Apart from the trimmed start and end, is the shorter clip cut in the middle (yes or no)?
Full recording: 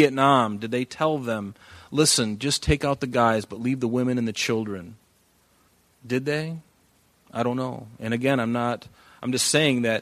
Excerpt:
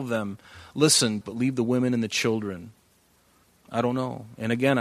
yes